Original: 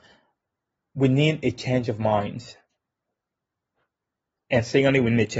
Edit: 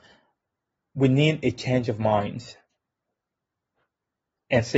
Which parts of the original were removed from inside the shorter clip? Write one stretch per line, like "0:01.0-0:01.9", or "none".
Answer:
none